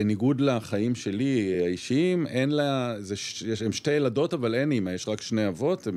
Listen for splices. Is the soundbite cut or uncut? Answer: uncut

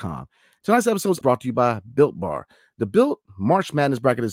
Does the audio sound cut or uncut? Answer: cut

